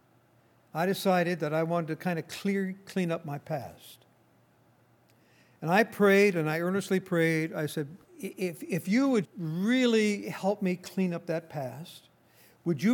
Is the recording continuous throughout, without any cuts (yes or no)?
no